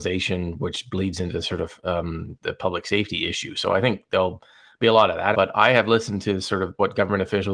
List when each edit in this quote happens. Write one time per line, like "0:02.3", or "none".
0:05.3